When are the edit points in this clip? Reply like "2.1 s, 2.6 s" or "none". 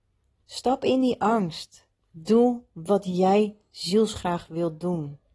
2.0 s

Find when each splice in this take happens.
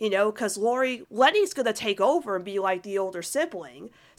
1.0 s

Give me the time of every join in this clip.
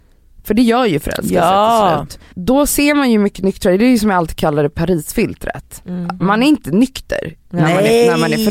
2.3 s, 6.2 s

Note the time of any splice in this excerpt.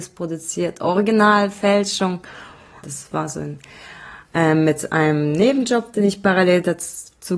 2.8 s

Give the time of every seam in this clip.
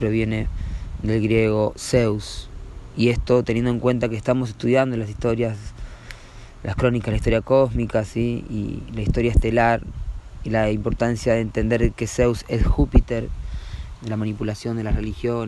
14.0 s

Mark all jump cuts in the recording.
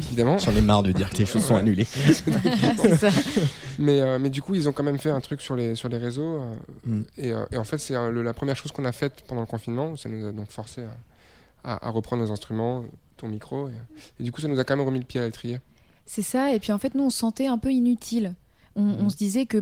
none

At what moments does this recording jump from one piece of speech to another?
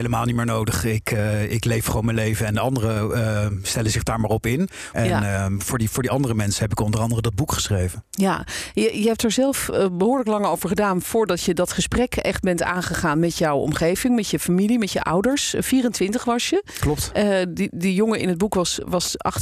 4.9 s

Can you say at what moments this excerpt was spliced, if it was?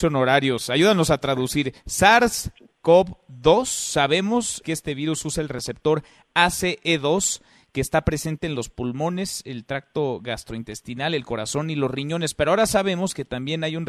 4.6 s

